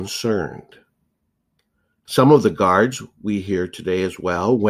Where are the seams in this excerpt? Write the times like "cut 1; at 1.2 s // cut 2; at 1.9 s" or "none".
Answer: cut 1; at 2.1 s